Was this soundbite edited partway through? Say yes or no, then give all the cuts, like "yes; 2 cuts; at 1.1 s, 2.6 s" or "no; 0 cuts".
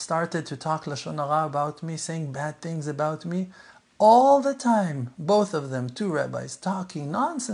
no; 0 cuts